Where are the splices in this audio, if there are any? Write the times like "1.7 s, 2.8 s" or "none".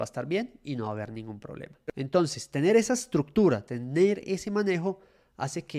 1.9 s